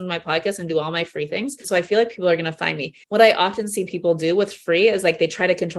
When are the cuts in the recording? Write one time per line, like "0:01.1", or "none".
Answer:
0:01.6
0:03.0